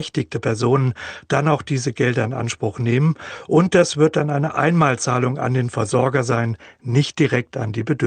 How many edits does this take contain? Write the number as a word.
zero